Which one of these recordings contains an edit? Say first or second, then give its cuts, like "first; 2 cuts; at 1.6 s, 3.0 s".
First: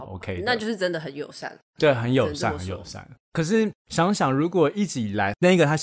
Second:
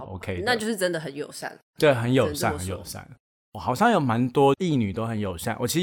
first; 1 cut; at 3.2 s